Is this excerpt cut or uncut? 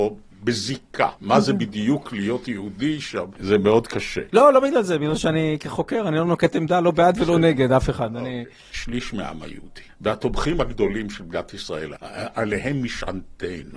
cut